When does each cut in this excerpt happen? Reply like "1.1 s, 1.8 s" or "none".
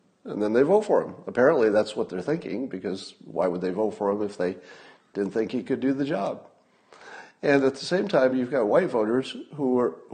none